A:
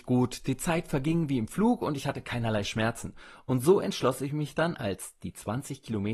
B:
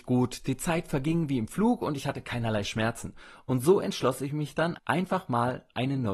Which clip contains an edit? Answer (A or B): B